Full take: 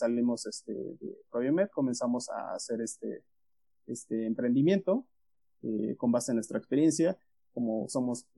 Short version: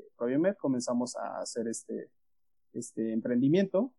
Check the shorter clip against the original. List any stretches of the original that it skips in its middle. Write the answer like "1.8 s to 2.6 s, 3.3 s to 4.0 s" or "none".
none

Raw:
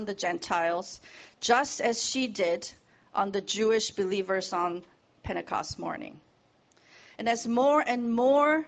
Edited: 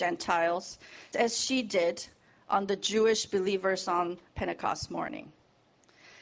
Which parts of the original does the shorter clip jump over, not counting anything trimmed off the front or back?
1.3 s to 1.8 s, 4.9 s to 5.2 s

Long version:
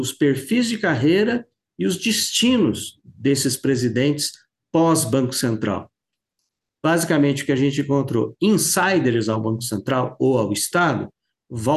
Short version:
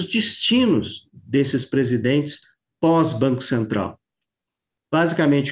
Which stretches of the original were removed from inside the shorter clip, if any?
none

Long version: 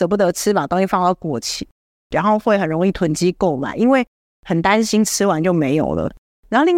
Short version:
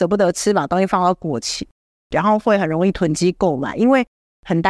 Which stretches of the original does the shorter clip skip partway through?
none

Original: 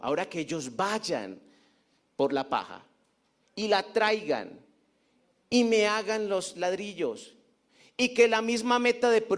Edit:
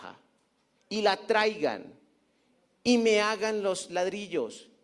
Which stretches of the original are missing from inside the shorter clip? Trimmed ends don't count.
none

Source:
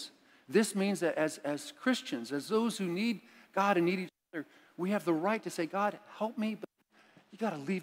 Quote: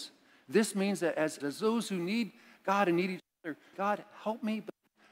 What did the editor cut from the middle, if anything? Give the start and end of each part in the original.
1.4 s to 2.3 s, 4.6 s to 5.7 s

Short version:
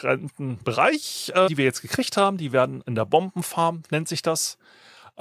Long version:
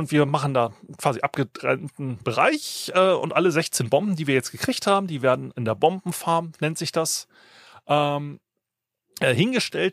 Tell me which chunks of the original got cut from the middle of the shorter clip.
3.1 s to 4.2 s

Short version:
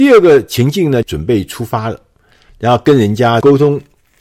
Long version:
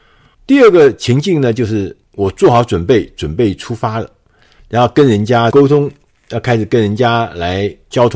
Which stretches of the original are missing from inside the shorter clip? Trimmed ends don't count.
1.5 s to 3.1 s

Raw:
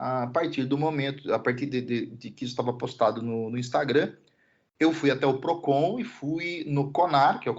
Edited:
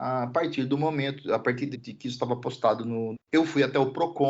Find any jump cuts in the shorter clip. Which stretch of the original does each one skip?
1.7 s to 2.1 s, 3.5 s to 4.6 s

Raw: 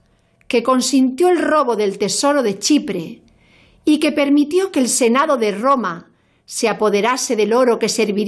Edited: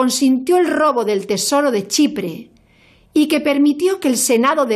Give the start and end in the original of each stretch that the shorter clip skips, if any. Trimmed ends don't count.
none

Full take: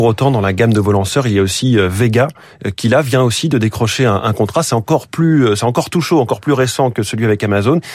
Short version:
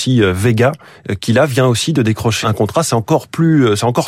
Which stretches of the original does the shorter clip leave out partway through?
4.0 s to 4.2 s

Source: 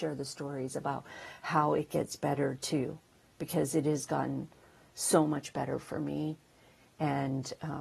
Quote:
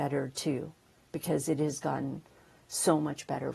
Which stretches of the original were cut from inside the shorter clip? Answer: none

